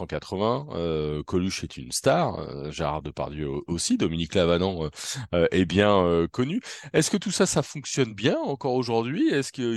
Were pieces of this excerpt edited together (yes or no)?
no